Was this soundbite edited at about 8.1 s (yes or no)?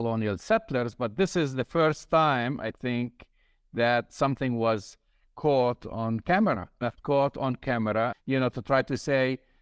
yes